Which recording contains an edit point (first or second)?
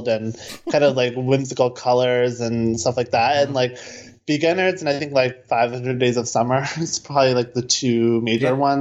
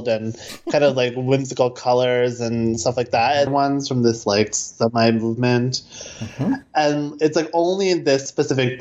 second